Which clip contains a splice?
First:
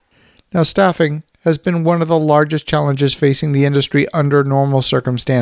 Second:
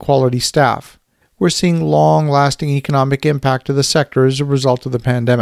second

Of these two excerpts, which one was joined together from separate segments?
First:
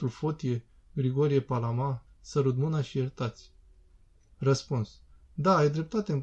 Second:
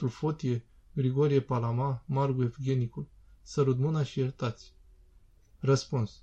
first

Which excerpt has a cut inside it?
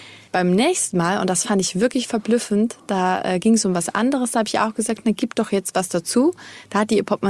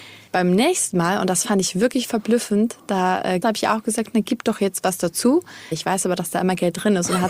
second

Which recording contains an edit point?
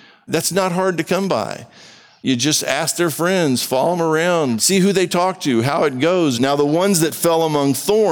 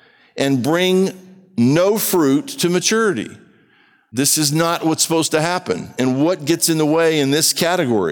first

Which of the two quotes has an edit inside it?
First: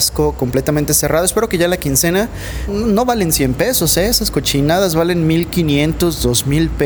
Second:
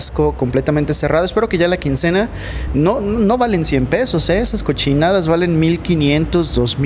first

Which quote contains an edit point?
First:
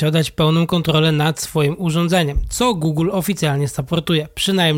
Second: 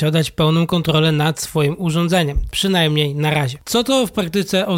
second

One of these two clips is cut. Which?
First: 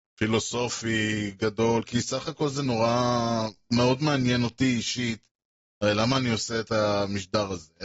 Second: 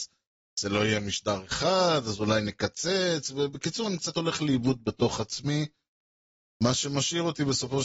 first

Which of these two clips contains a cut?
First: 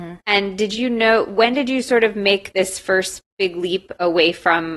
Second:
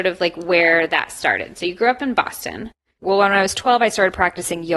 second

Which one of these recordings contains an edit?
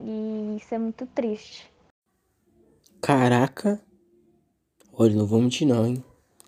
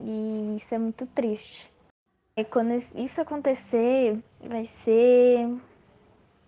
second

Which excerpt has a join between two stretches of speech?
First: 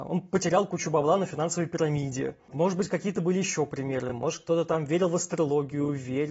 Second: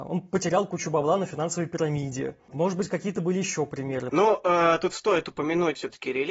second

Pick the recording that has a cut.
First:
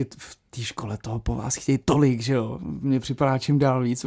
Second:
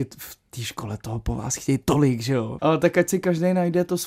second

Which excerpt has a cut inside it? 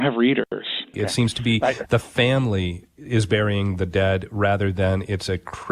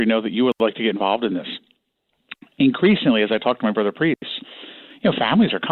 first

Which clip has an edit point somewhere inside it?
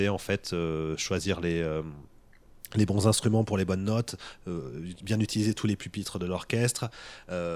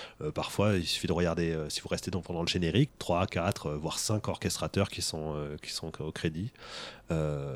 second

